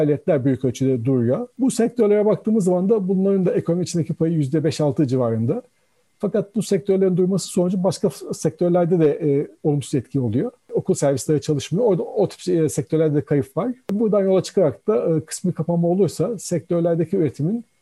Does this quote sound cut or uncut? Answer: uncut